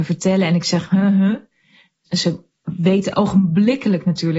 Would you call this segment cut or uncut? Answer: cut